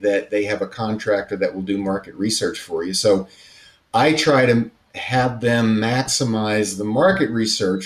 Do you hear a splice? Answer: no; 0 cuts

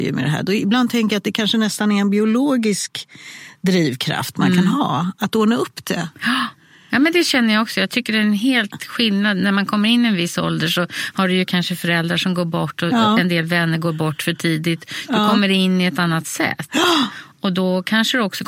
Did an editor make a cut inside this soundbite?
no; 0 cuts

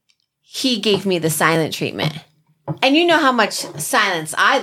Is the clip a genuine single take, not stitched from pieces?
yes; 0 cuts

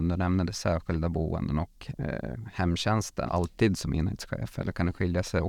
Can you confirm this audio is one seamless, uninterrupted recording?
no; 1 cut; at 3.3 s

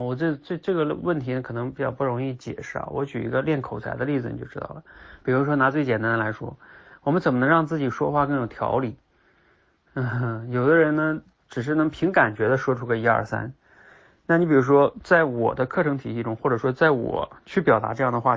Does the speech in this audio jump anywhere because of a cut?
yes; 1 cut; at 5.2 s

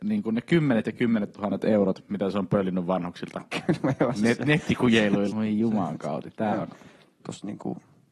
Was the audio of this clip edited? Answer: yes; 2 cuts; at 5.3 s, 7.1 s

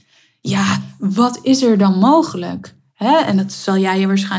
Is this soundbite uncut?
yes; 0 cuts

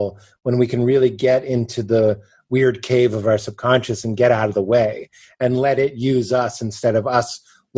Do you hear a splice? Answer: no; 0 cuts

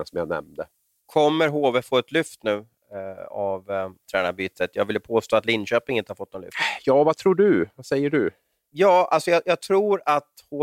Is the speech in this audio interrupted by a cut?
no; 0 cuts

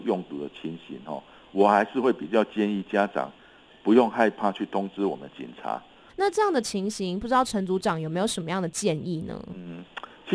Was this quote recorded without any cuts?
no; 1 cut; at 6.1 s

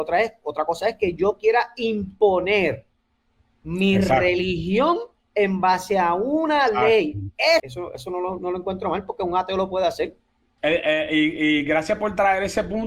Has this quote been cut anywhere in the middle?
yes; 2 cuts; at 7.6 s, 10.6 s

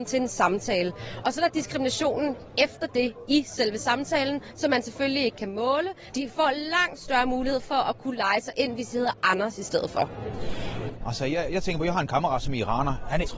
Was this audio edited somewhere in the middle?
yes; 2 cuts; at 6.1 s, 11.0 s

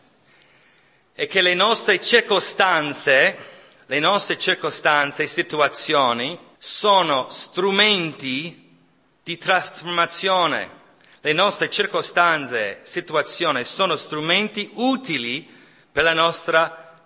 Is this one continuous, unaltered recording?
no; 1 cut; at 6.5 s

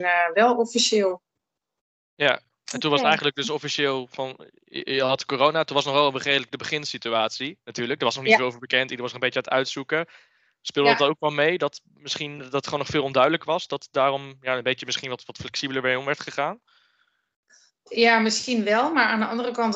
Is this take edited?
no; 0 cuts

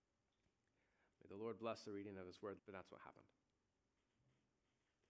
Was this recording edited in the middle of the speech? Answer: yes; 1 cut; at 2.6 s

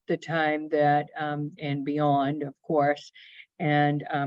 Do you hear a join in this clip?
yes; 1 cut; at 1.6 s

